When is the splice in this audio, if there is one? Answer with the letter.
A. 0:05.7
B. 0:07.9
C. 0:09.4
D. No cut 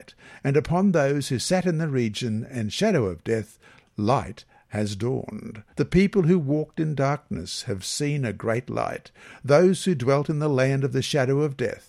A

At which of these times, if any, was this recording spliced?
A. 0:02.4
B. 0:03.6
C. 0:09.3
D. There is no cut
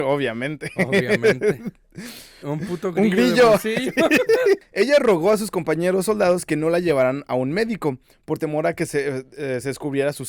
A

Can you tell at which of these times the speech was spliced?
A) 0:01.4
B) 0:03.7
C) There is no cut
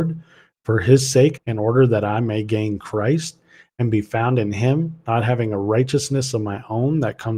A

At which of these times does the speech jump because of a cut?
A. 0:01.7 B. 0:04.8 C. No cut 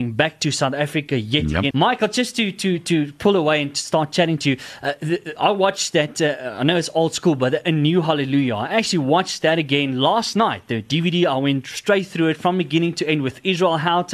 A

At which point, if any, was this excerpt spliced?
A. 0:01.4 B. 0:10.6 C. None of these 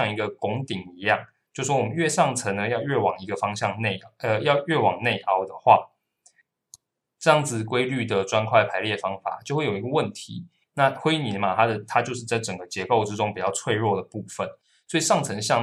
B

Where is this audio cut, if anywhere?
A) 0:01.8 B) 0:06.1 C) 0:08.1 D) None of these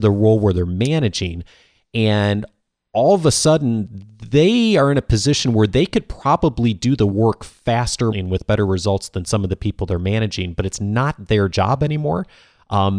C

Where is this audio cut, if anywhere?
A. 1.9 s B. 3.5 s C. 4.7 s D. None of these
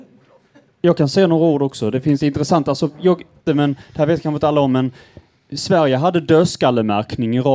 B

